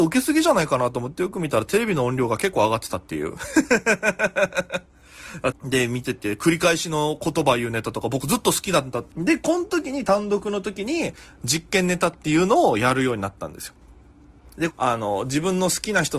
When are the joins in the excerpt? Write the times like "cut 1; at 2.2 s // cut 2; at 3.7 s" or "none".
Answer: cut 1; at 5.5 s // cut 2; at 9.1 s // cut 3; at 14.7 s